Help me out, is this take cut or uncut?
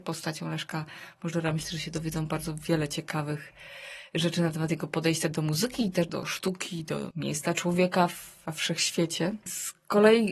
uncut